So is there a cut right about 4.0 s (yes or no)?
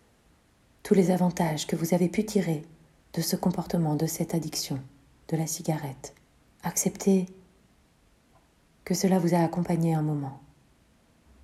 no